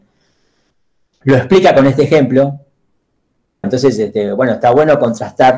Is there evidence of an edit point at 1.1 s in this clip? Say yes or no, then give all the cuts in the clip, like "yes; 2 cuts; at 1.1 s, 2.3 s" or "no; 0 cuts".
no; 1 cut; at 3.6 s